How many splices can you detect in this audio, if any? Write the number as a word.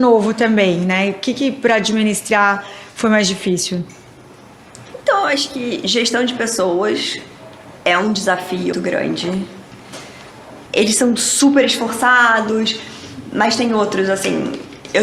two